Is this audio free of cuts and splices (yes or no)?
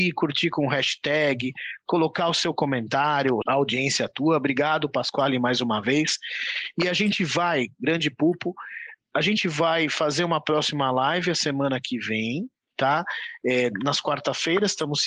no